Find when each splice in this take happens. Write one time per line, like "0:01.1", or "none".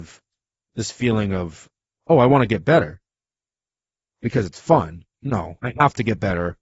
0:05.6